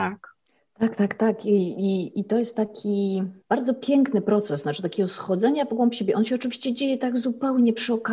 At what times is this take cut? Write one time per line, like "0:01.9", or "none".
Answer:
0:03.4